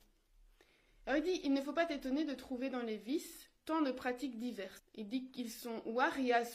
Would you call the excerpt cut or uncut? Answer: cut